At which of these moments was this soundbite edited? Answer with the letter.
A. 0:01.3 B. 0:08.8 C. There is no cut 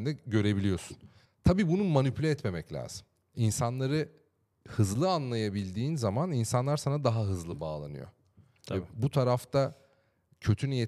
A